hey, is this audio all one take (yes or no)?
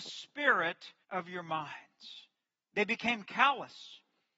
no